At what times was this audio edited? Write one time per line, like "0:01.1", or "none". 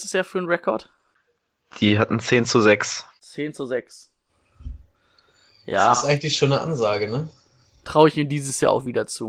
none